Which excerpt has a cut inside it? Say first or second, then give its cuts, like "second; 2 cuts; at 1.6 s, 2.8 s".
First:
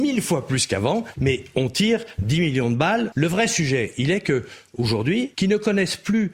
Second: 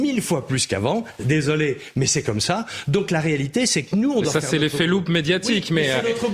first; 3 cuts; at 1.1 s, 3.1 s, 5.3 s